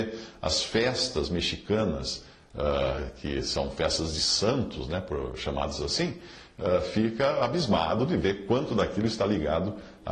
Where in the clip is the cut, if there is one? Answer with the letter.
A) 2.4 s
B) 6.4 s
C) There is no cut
C